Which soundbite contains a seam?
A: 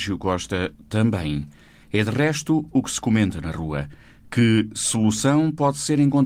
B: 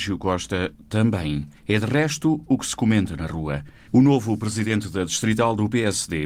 B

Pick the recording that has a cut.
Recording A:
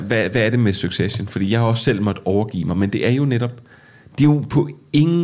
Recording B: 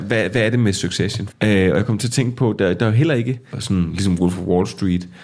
B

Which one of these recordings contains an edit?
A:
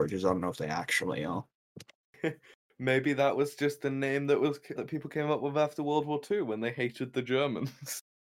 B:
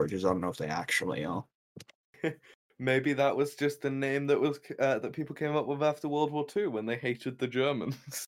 A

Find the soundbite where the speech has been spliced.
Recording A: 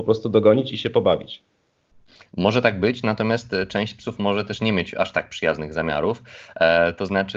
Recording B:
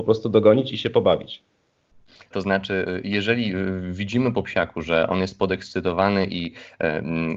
B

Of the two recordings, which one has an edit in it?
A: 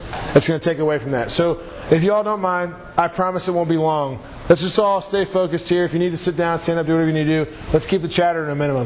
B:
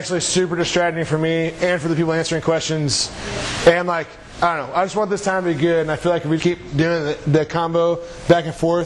B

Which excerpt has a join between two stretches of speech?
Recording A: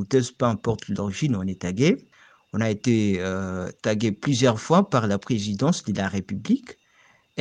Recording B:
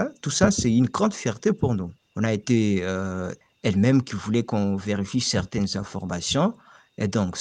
B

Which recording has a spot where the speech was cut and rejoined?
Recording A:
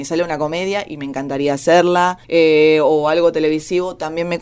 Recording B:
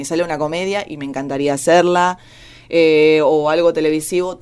A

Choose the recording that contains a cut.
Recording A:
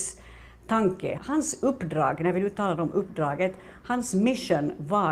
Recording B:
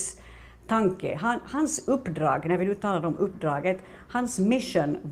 A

